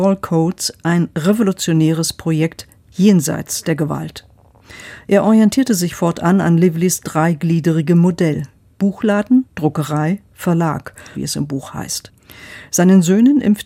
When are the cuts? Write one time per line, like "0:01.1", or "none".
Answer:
0:11.1